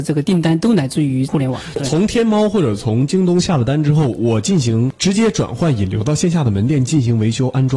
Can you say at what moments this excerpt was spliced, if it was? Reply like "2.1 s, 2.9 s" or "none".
none